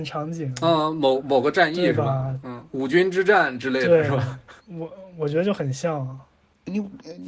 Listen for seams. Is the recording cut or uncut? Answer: cut